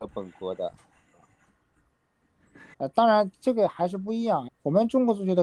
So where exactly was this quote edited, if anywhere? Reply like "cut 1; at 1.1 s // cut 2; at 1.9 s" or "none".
cut 1; at 2.7 s // cut 2; at 4.5 s